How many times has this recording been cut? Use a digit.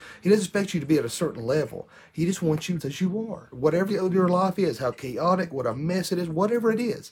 2